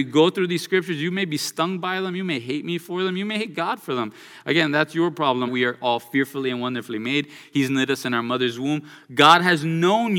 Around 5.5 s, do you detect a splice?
yes; 1 cut; at 5.5 s

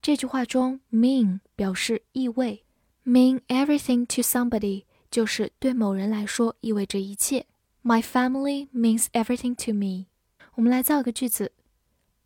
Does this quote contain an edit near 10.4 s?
yes; 2 cuts; at 7.8 s, 10.4 s

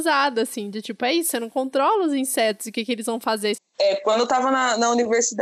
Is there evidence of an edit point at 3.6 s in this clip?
yes; 1 cut; at 3.6 s

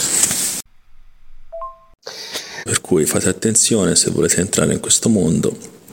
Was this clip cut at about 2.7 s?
yes; 1 cut; at 2.7 s

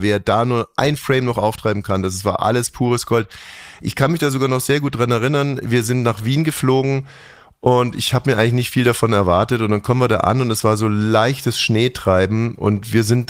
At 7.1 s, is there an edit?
no; 0 cuts

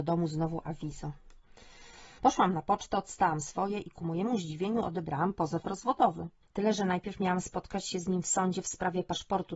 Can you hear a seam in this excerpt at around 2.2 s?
yes; 2 cuts; at 2.2 s, 6.4 s

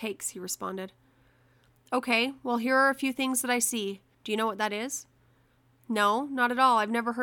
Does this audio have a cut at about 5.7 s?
no; 1 cut; at 4.1 s

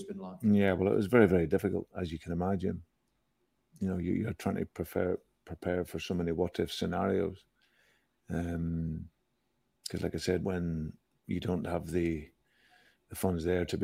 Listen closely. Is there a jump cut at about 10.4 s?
yes; 1 cut; at 10.4 s

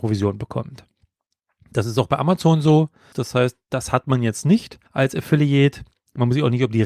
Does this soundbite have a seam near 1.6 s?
no; 2 cuts; at 3.1 s, 4.9 s

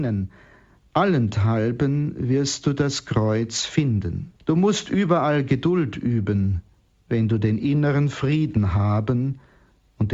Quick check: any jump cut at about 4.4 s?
yes; 1 cut; at 4.4 s

